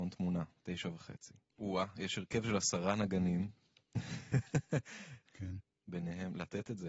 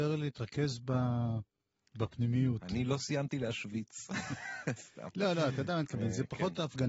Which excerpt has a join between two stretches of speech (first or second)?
first